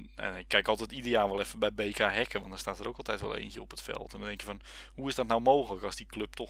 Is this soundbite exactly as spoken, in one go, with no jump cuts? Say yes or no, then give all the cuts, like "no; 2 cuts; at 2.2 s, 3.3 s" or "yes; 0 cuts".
yes; 0 cuts